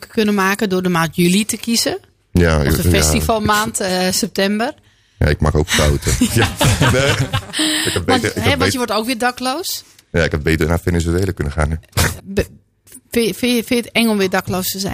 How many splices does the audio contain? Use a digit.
1